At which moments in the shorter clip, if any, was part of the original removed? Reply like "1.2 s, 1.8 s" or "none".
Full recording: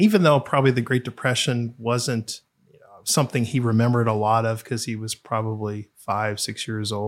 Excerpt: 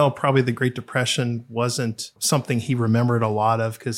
2.2 s